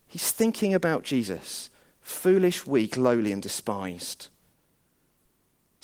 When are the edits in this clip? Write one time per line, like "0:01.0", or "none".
none